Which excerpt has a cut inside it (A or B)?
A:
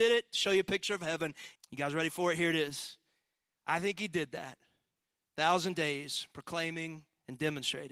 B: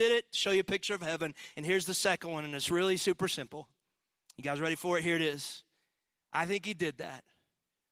A